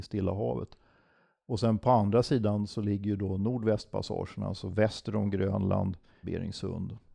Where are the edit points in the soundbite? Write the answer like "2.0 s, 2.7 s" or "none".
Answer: 6.2 s